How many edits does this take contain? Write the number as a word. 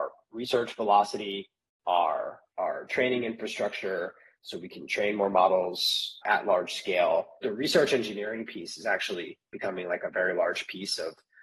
one